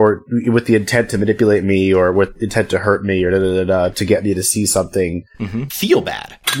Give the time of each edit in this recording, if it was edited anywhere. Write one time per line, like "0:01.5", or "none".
0:05.7